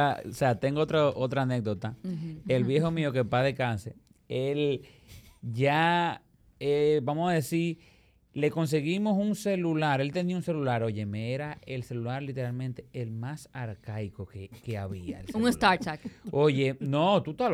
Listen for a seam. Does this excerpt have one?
no; 0 cuts

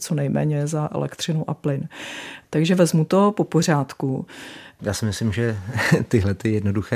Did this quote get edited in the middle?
yes; 1 cut; at 4.8 s

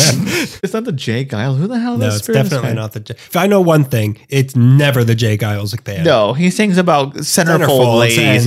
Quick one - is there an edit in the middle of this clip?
no; 0 cuts

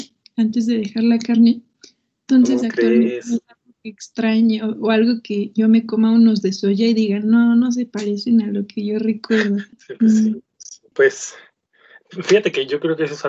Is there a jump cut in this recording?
yes; 2 cuts; at 9.7 s, 10.9 s

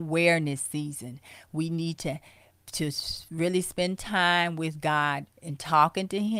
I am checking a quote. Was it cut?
yes; 1 cut; at 5.3 s

